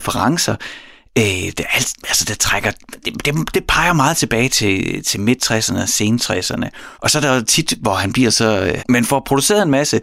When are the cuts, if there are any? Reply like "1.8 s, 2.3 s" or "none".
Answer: 6.9 s, 8.8 s